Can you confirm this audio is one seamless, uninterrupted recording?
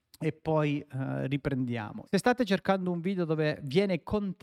no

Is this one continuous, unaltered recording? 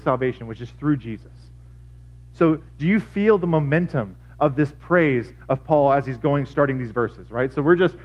yes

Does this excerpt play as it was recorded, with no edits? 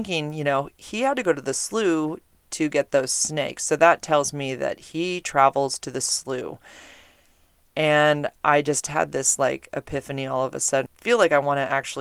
no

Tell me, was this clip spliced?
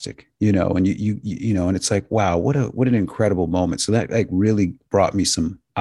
no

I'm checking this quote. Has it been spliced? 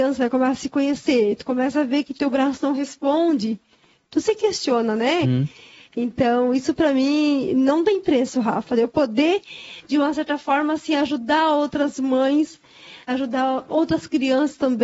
yes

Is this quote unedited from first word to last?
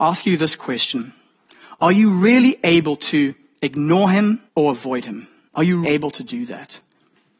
no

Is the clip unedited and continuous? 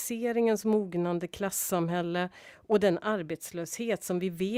yes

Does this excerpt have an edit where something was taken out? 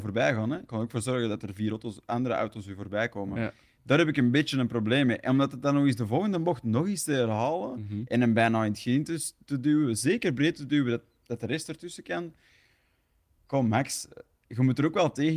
no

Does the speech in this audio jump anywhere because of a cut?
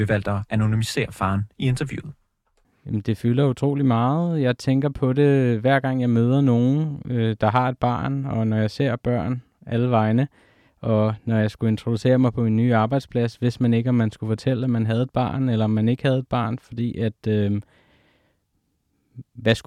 no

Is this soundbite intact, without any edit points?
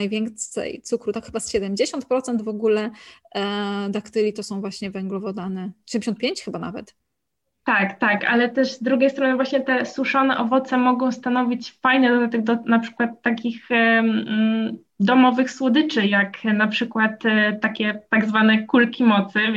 yes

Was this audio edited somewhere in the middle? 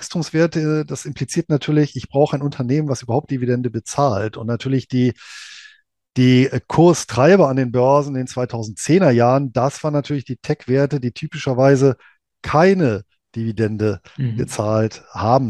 no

